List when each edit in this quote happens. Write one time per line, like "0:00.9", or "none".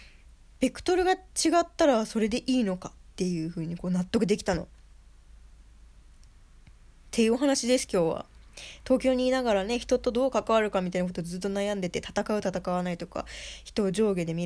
none